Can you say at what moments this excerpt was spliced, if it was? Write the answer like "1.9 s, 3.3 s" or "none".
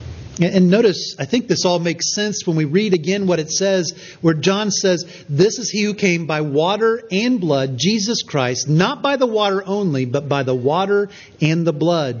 none